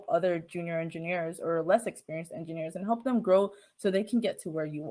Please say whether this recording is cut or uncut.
uncut